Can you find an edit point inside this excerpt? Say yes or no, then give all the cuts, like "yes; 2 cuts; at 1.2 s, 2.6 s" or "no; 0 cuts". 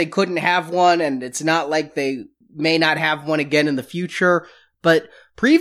no; 0 cuts